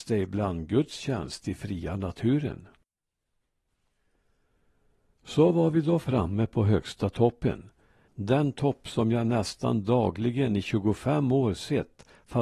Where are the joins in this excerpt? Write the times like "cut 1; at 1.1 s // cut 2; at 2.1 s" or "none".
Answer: none